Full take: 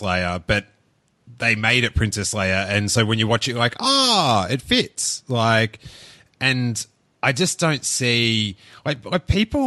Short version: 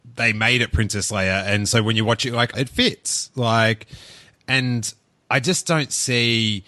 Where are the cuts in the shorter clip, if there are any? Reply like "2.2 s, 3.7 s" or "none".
2.5 s